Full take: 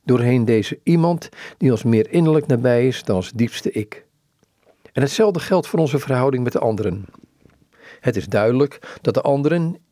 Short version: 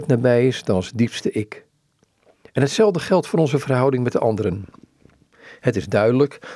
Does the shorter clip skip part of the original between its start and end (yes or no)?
no